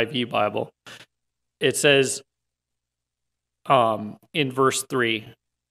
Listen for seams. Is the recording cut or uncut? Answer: uncut